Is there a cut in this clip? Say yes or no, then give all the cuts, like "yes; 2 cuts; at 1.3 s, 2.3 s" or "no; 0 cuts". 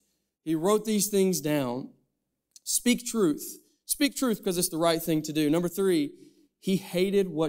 no; 0 cuts